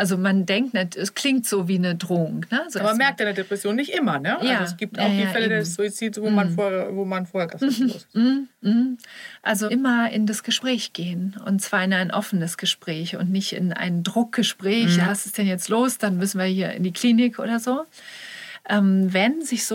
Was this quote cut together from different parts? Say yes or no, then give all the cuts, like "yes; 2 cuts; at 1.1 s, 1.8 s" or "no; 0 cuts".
yes; 3 cuts; at 7.5 s, 9.7 s, 15.0 s